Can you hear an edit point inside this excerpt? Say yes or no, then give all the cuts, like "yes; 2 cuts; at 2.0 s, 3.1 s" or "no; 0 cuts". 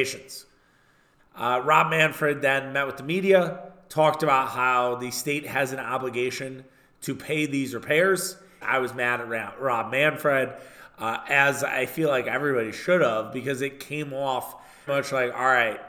yes; 3 cuts; at 1.2 s, 8.6 s, 14.9 s